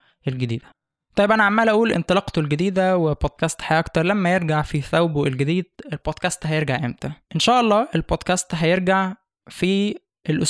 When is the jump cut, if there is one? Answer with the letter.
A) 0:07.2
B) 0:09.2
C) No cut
A